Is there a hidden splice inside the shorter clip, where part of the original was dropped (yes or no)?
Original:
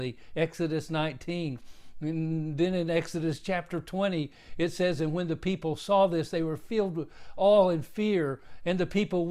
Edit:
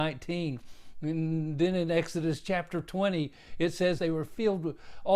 yes